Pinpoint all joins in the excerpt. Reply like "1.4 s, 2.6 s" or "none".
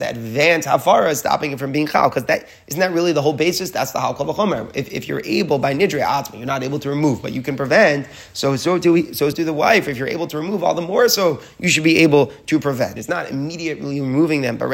9.3 s, 13.0 s